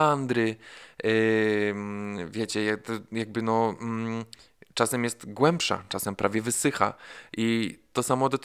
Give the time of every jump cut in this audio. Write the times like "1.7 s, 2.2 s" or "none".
none